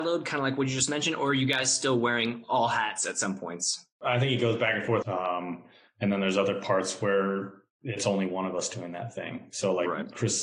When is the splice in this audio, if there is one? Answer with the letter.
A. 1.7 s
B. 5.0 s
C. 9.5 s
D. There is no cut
B